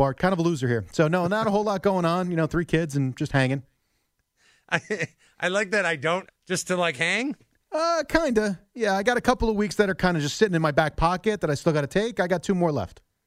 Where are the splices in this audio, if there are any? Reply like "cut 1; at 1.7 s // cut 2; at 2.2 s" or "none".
cut 1; at 6.3 s